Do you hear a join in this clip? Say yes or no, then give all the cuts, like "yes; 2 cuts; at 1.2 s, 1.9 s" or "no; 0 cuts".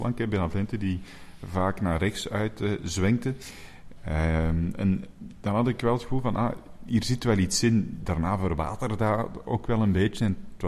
no; 0 cuts